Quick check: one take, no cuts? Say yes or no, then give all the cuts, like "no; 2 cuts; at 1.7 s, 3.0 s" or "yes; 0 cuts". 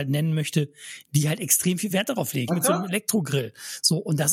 no; 1 cut; at 2.5 s